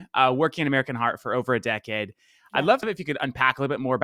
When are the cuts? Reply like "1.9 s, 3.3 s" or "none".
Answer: none